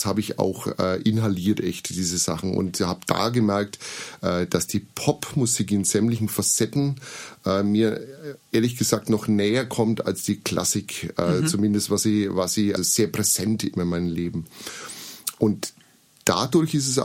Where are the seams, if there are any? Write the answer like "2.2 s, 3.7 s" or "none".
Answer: 12.8 s